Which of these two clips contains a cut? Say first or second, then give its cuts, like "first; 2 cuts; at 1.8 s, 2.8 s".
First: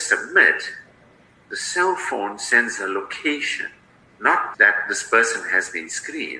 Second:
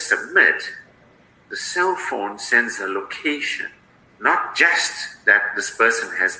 first; 1 cut; at 4.5 s